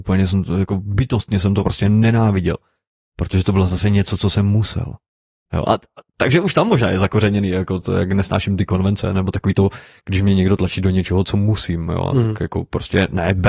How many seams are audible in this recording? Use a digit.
1